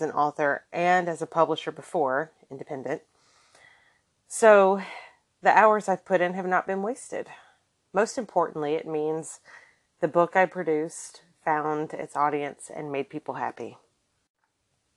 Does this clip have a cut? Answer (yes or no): no